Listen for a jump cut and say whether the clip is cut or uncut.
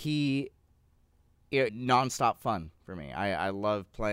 cut